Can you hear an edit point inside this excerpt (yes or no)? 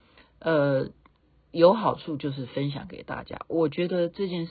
no